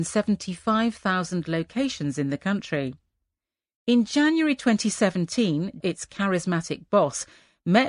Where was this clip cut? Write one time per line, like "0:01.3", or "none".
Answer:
0:05.8